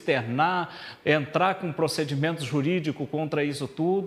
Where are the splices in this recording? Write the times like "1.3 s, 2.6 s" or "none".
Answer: 1.0 s